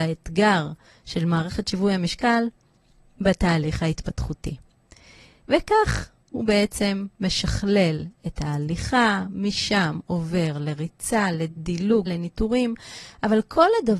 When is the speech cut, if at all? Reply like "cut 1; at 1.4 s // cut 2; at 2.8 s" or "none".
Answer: cut 1; at 12.1 s